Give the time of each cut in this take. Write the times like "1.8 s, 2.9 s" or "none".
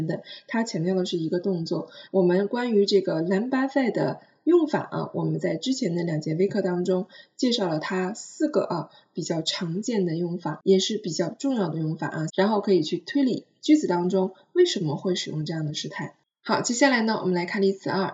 2.1 s, 12.3 s